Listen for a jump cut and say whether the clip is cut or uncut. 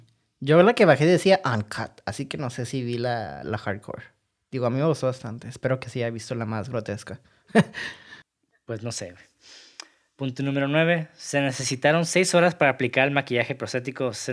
uncut